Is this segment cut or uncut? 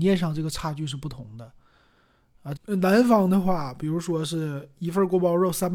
cut